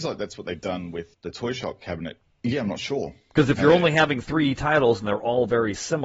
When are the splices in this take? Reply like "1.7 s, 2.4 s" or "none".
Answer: 1.1 s, 2.2 s